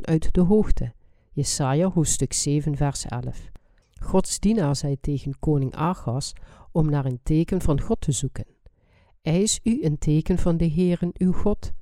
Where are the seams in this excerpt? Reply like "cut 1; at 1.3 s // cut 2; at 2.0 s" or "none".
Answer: cut 1; at 3.8 s